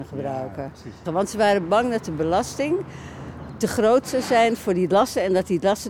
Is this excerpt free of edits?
no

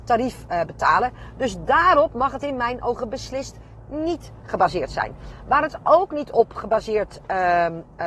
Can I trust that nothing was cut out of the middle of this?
yes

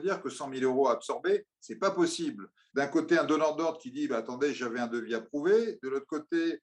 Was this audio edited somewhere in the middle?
yes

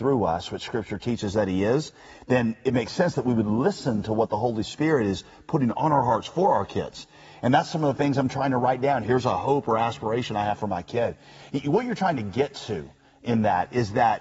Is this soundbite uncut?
no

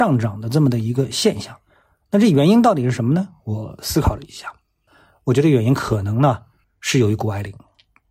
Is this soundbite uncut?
yes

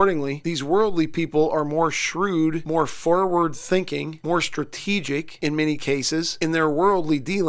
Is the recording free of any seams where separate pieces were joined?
yes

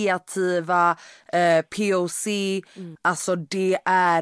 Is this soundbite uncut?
no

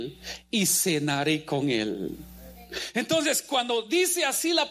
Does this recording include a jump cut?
no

